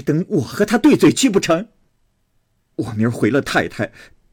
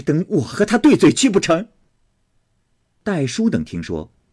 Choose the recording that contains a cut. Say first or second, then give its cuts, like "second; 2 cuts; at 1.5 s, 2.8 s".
first; 1 cut; at 2.7 s